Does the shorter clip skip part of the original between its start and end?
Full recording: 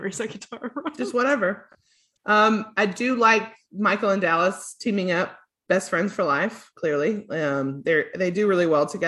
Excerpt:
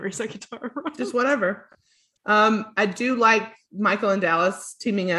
no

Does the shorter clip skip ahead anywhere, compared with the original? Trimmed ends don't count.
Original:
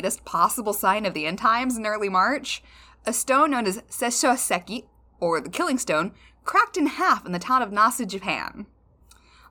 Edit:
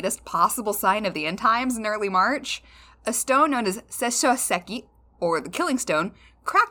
no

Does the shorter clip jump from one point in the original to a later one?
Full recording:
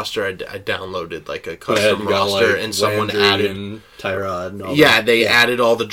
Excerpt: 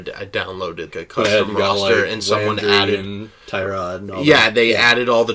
yes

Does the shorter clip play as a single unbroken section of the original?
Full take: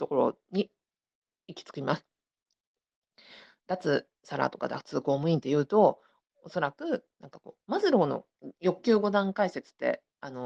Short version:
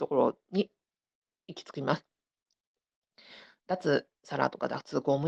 yes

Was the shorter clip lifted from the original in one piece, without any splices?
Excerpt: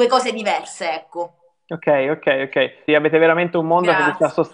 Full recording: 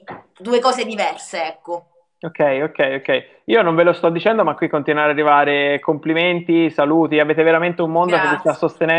no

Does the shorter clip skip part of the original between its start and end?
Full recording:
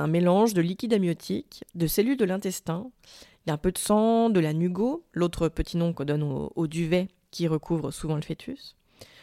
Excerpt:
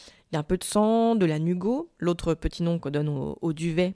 no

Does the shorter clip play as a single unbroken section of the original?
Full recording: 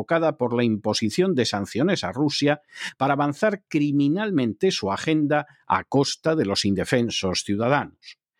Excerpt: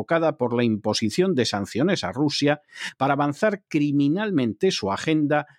yes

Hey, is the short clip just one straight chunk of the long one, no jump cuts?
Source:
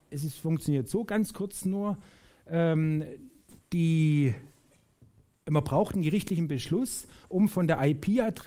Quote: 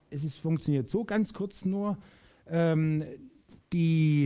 yes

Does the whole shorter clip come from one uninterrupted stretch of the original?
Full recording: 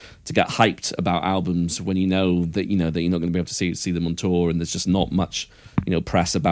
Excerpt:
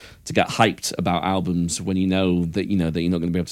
yes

